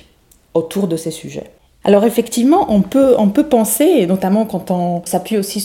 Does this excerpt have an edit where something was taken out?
yes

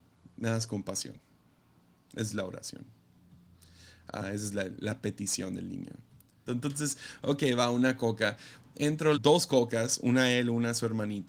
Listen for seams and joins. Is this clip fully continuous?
no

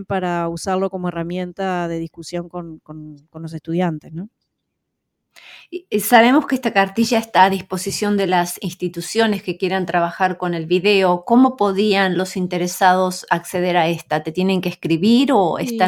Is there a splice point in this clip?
no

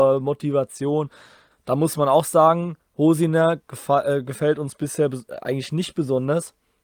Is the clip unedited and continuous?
no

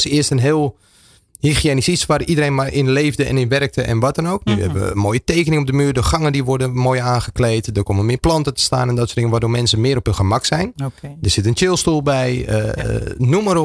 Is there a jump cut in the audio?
no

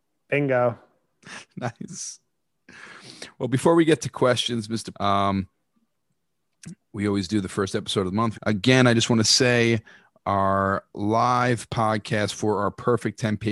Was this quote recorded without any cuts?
no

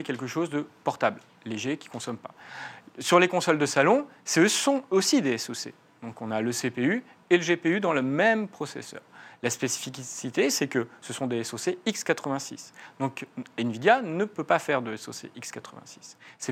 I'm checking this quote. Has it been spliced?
no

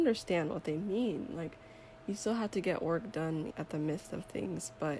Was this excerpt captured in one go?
no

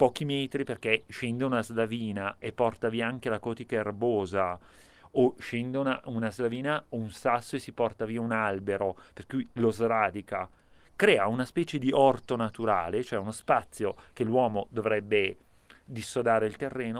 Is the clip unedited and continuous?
yes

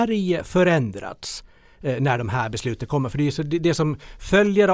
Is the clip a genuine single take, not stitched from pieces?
yes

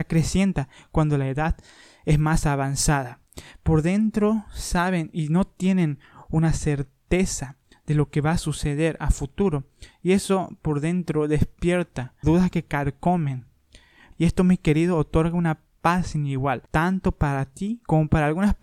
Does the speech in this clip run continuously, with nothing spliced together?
no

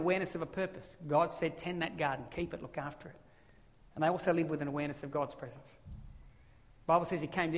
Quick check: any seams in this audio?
no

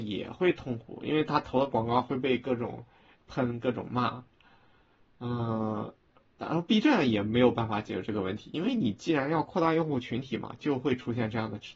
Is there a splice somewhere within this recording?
no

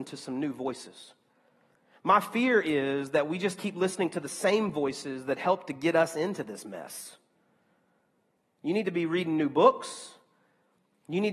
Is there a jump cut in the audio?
no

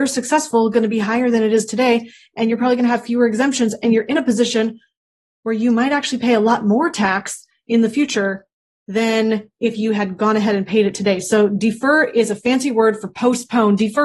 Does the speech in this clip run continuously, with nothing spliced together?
yes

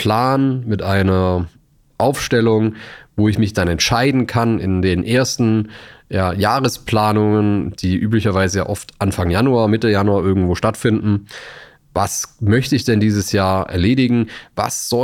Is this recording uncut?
yes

